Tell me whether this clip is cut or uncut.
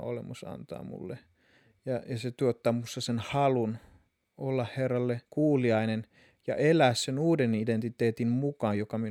cut